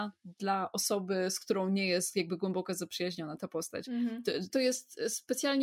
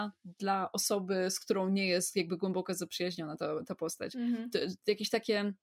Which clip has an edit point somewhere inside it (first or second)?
first